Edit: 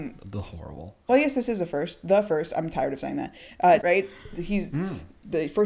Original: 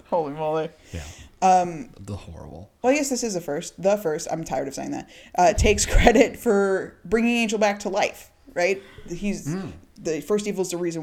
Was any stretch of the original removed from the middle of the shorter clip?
yes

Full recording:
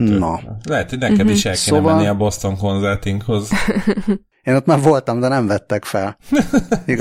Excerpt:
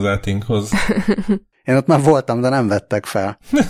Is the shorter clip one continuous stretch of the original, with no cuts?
yes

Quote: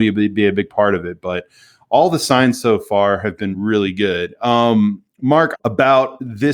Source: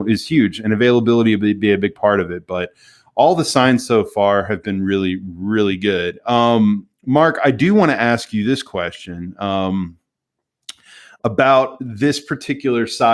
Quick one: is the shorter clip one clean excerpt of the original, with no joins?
no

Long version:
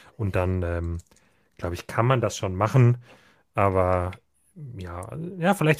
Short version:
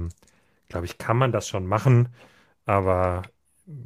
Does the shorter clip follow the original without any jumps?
yes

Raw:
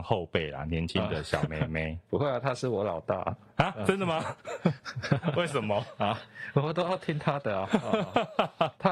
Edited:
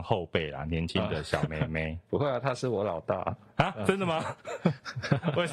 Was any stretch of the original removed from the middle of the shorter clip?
no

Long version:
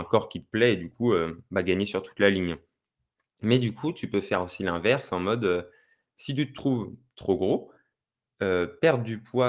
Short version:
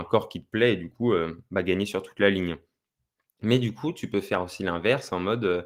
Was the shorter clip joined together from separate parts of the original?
no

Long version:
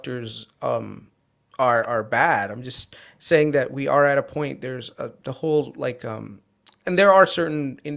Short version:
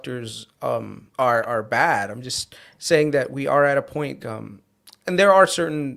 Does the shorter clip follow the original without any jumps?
no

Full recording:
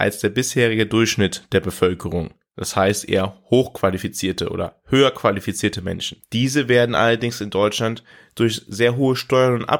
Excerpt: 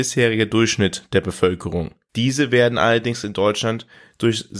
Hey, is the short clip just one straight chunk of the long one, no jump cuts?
no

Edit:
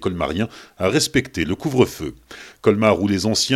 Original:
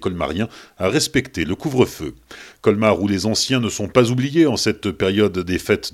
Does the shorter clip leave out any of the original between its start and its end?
no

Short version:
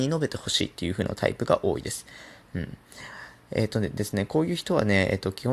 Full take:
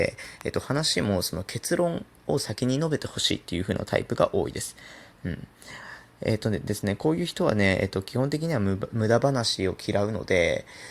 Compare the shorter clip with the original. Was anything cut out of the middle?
no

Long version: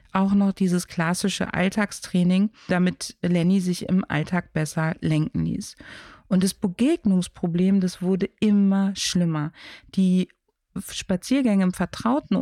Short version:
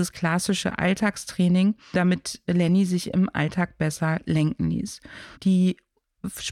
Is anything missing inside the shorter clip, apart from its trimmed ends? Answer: yes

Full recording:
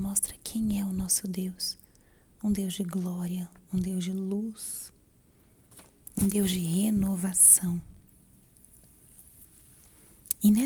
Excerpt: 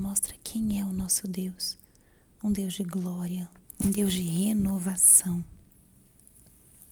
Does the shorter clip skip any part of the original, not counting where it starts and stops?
yes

